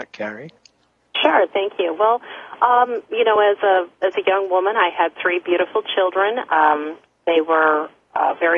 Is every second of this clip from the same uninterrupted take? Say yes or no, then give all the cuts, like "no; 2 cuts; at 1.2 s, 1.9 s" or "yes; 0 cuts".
yes; 0 cuts